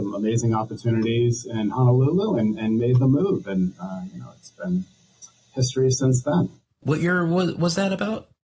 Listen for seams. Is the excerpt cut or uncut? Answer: uncut